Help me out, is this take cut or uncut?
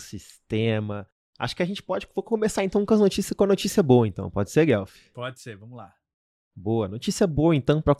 uncut